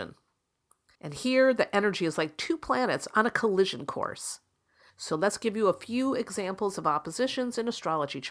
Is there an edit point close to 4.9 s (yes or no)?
yes